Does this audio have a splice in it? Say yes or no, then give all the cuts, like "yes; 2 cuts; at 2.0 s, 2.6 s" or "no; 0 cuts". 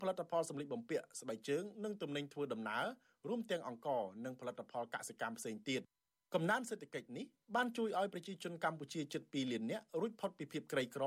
no; 0 cuts